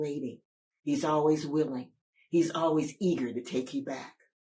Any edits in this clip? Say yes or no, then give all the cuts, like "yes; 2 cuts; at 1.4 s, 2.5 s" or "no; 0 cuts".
no; 0 cuts